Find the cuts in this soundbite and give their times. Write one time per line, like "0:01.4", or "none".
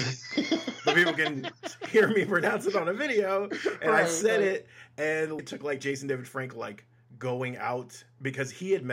0:05.4